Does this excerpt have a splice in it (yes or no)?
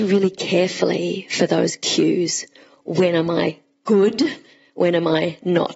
no